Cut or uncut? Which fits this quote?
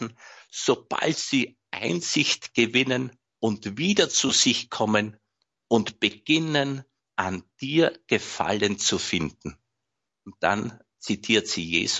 cut